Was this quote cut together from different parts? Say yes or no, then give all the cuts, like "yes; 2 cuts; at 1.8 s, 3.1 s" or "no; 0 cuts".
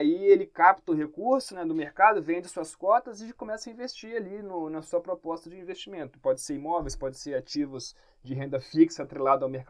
no; 0 cuts